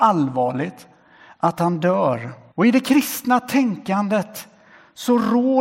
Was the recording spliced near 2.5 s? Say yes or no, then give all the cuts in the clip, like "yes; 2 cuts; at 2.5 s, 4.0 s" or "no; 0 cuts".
yes; 1 cut; at 2.5 s